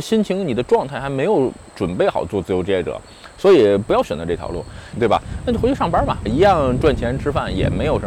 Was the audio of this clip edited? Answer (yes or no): yes